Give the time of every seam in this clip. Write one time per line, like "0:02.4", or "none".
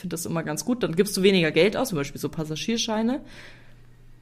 0:01.9

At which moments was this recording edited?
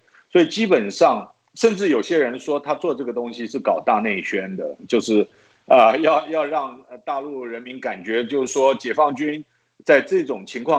none

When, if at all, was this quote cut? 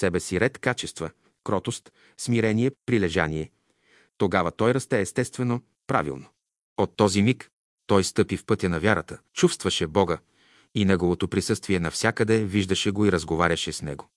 0:02.7
0:06.6
0:09.3

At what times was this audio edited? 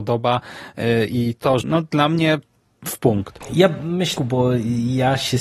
0:01.6
0:04.2

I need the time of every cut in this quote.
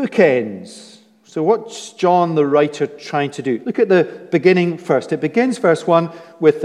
0:03.6

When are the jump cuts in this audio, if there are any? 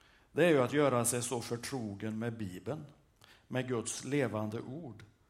none

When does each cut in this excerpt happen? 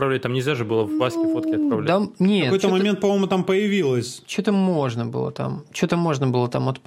none

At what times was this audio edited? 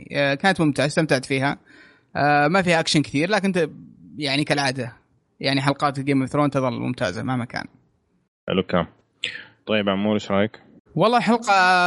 0:10.9

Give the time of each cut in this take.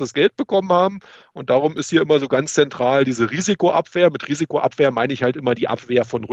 0:01.3

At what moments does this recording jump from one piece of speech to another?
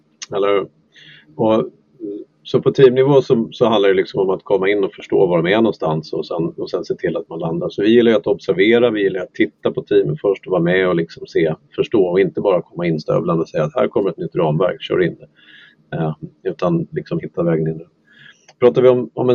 none

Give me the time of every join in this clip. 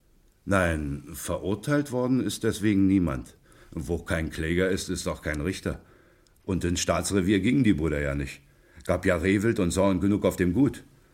none

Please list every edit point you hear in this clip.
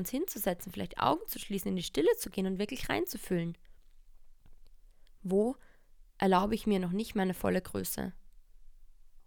none

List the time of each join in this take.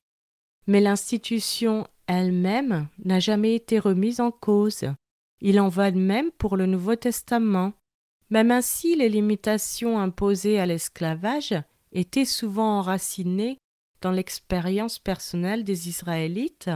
none

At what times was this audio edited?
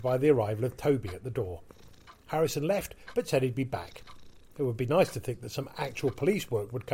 none

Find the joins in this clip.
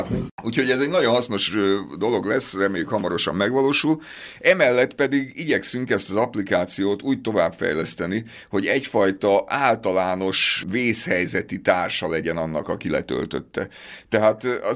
none

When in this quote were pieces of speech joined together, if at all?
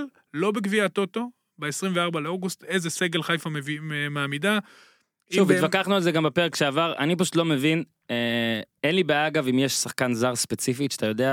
none

